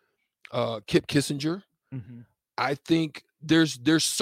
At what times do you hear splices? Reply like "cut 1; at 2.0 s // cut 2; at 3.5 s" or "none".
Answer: none

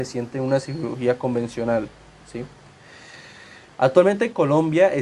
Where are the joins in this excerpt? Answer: cut 1; at 3.7 s

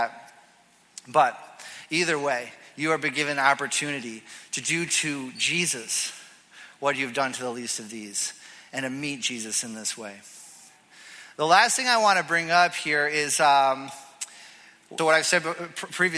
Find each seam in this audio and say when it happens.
cut 1; at 15.0 s

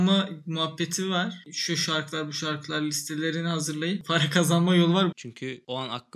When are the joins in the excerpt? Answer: cut 1; at 1.4 s // cut 2; at 5.1 s

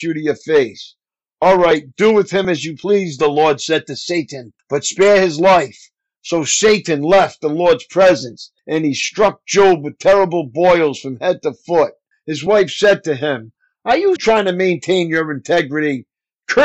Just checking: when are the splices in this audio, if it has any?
cut 1; at 12.1 s // cut 2; at 14.2 s

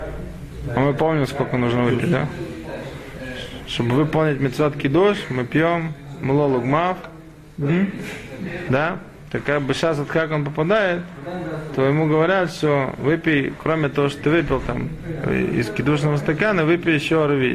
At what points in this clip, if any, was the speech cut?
cut 1; at 8.7 s

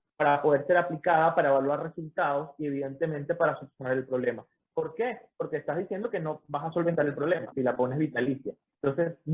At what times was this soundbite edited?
cut 1; at 4.6 s // cut 2; at 7.5 s

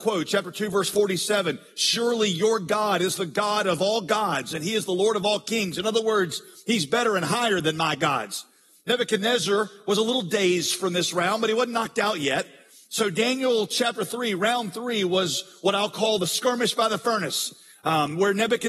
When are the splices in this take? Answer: none

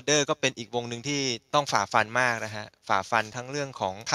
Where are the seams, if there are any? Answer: none

